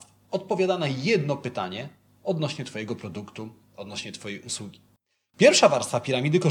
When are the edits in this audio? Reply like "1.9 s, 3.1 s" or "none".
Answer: none